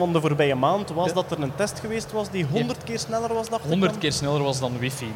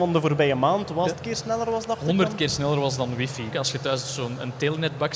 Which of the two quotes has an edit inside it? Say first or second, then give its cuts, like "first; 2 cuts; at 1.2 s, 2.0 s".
second; 2 cuts; at 1.1 s, 3.5 s